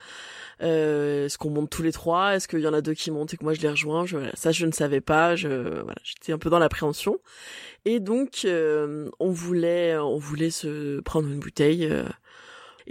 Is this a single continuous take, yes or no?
yes